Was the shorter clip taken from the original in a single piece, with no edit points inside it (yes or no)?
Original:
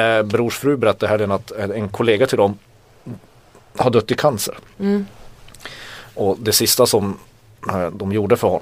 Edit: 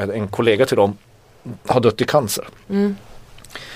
no